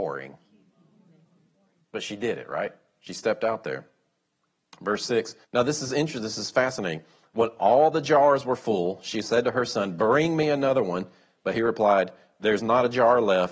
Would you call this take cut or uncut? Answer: cut